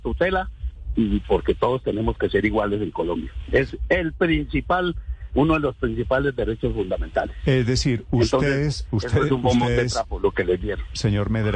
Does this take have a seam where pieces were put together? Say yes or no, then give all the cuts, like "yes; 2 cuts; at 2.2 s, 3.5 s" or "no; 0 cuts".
no; 0 cuts